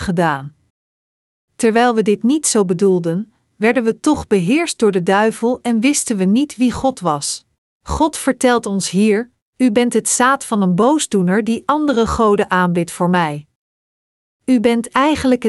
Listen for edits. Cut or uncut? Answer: cut